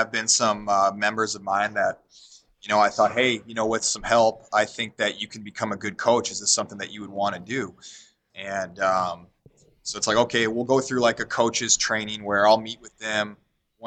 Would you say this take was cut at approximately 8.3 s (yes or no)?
yes